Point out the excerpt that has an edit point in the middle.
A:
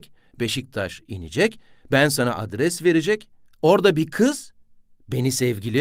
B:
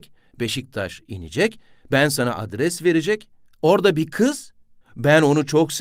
B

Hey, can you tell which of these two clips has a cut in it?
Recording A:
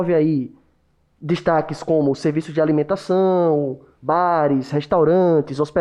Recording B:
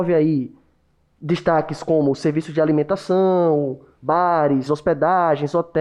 B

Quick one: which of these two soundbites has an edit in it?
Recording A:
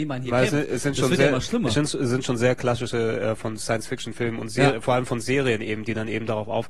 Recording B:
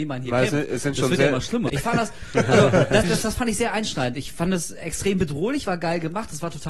B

